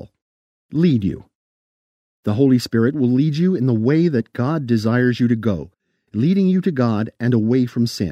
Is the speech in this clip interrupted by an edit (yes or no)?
no